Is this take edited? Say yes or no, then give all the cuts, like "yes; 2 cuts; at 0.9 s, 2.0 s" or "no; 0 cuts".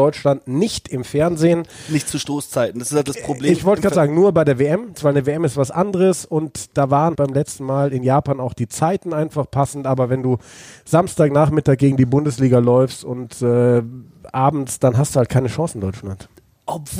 yes; 2 cuts; at 5.0 s, 7.2 s